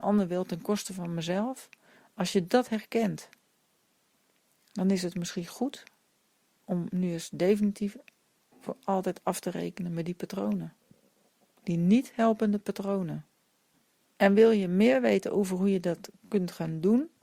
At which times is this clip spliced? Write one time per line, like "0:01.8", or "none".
none